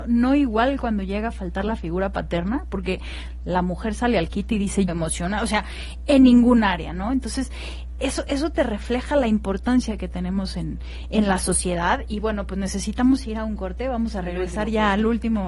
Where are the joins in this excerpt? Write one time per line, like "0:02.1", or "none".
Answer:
0:04.9